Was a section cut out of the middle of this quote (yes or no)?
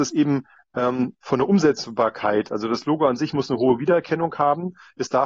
no